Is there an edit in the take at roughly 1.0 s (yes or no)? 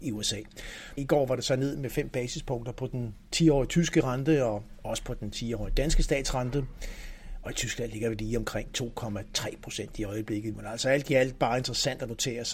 yes